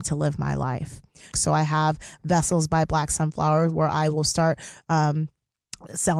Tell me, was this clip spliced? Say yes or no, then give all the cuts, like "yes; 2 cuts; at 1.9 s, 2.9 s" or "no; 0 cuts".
yes; 1 cut; at 1.3 s